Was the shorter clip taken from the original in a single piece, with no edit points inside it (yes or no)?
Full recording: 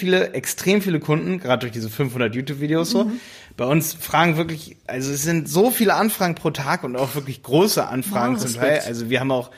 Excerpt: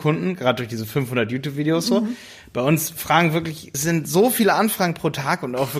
no